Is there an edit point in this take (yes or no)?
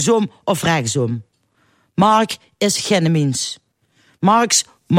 no